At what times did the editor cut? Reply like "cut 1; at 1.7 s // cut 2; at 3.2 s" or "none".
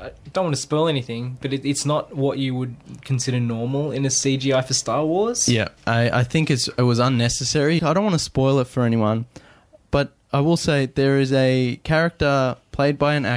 cut 1; at 5.8 s // cut 2; at 7.8 s

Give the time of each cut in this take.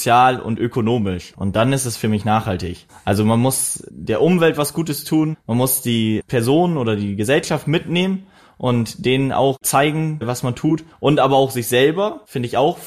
cut 1; at 1.3 s

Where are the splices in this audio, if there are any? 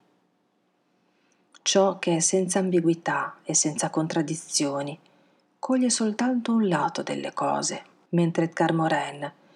cut 1; at 8.1 s

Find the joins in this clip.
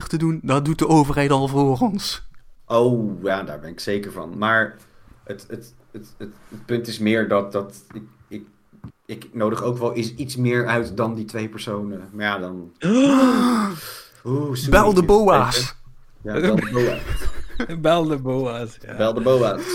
cut 1; at 8.9 s

